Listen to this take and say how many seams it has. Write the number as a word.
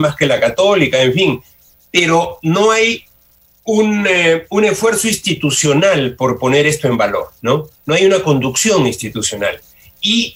one